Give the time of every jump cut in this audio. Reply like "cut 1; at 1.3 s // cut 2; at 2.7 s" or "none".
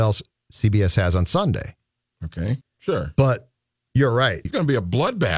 cut 1; at 2.6 s // cut 2; at 4.5 s